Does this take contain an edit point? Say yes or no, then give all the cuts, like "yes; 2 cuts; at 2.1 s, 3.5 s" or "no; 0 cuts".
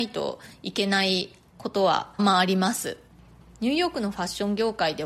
yes; 1 cut; at 2.2 s